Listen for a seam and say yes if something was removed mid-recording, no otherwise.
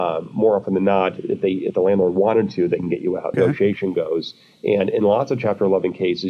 yes